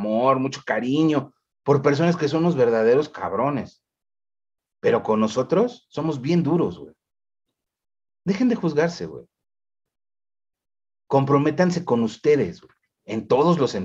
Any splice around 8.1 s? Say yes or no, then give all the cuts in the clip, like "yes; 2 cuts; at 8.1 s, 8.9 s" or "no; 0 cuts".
yes; 1 cut; at 8.1 s